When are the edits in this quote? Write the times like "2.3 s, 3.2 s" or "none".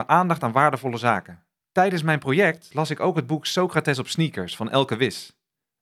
1.6 s